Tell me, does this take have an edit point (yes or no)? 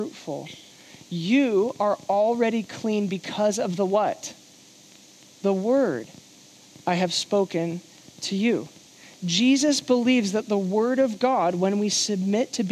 no